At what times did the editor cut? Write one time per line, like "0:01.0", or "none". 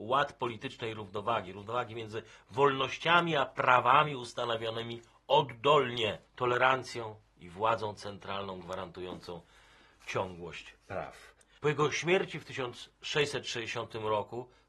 0:06.3
0:11.6